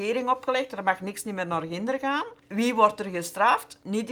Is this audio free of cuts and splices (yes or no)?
no